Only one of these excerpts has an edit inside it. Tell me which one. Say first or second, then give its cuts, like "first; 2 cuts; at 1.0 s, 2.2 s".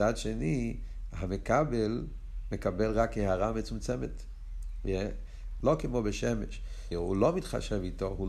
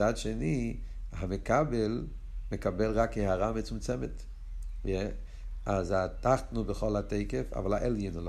first; 2 cuts; at 5.6 s, 6.9 s